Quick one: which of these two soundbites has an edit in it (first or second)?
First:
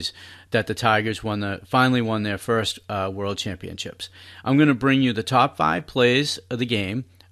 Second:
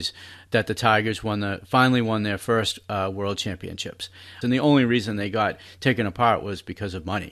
second